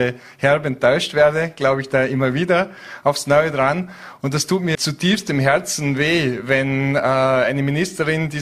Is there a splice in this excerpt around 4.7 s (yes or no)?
yes